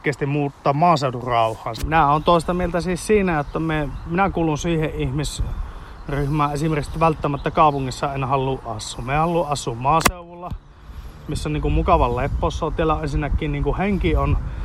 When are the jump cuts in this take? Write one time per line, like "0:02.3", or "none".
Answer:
0:01.8